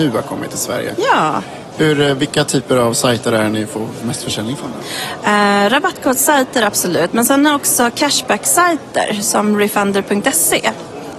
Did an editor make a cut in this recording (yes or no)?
yes